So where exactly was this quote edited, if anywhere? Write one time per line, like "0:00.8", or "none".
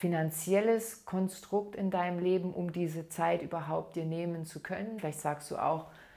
0:05.0